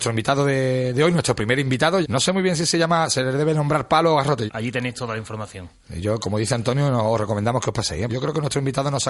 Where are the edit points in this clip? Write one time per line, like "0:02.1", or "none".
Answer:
0:02.0
0:04.5
0:08.1